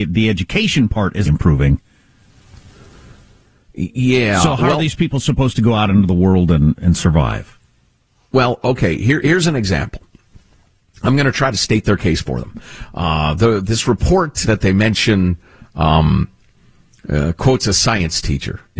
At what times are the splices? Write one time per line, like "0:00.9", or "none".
0:01.2
0:14.4

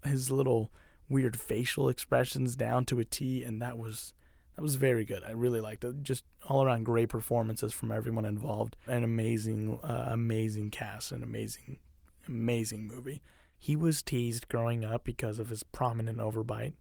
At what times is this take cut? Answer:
0:08.9
0:13.5

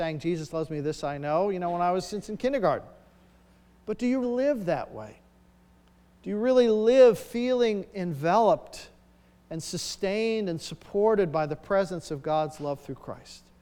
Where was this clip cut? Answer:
0:04.2

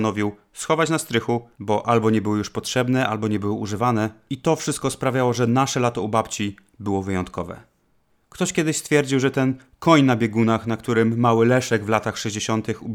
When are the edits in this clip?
none

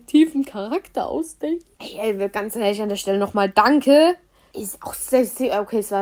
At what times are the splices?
0:01.7
0:04.5

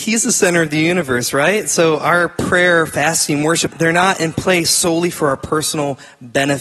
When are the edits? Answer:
0:03.7

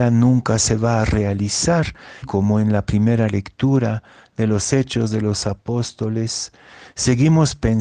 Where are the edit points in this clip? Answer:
0:02.2

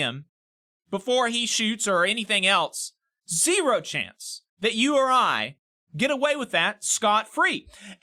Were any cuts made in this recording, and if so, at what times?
0:03.2
0:04.5

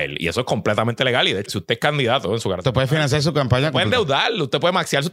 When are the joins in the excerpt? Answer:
0:01.5

